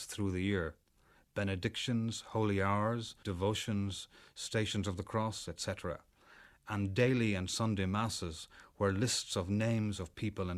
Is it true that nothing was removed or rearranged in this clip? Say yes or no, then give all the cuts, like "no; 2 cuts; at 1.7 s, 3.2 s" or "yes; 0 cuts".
no; 1 cut; at 3.2 s